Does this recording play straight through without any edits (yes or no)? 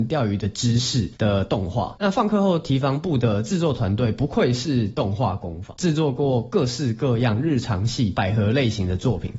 yes